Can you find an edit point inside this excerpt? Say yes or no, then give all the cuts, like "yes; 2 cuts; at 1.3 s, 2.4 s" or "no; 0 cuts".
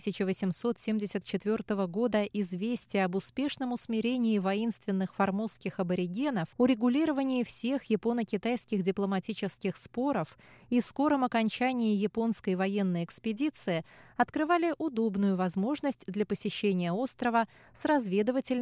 yes; 1 cut; at 6.5 s